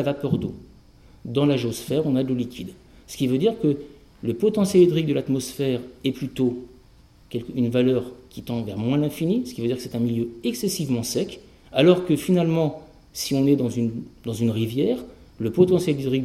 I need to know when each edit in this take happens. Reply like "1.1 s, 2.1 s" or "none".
11.6 s

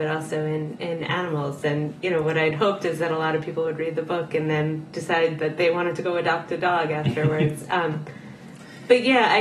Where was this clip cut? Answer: none

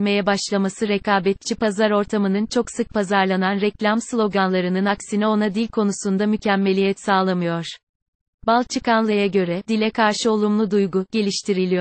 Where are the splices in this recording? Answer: 9.6 s

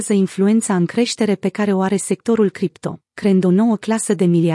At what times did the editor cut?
3.1 s

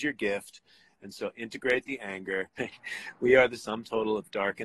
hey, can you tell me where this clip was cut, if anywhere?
2.6 s

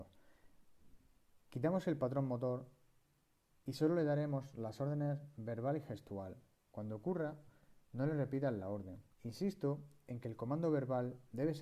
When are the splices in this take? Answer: 6.7 s, 9.1 s

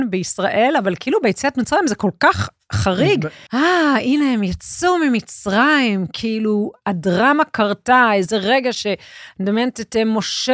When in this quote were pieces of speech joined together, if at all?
3.5 s

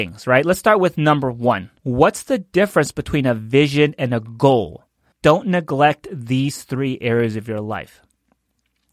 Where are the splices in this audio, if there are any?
1.8 s, 5.1 s

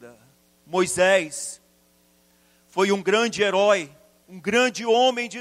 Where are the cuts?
4.2 s

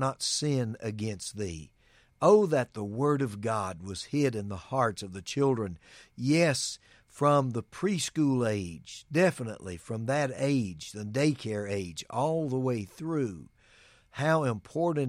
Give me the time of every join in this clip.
none

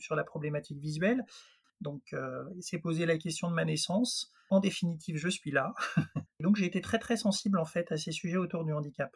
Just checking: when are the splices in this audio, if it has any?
1.6 s, 6.3 s

